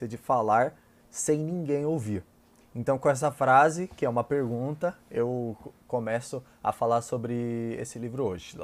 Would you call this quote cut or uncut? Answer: cut